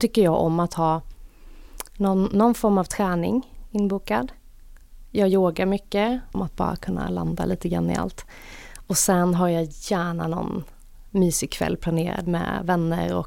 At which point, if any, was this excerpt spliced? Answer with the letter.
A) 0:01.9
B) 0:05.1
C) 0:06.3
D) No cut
C